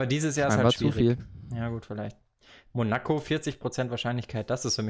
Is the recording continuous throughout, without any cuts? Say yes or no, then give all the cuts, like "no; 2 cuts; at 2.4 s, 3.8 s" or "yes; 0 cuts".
yes; 0 cuts